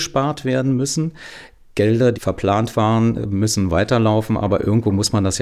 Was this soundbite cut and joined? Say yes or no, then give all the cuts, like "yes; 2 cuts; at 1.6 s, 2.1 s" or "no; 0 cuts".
yes; 1 cut; at 2.1 s